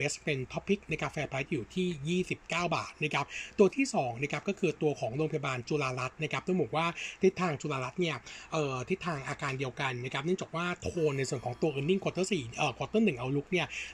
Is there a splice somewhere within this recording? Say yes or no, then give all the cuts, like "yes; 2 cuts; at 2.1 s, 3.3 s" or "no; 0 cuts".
no; 0 cuts